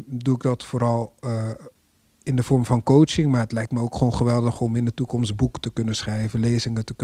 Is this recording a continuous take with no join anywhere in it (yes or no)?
yes